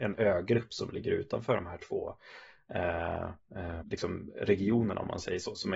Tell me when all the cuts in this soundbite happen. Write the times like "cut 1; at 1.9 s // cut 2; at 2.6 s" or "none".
cut 1; at 3.8 s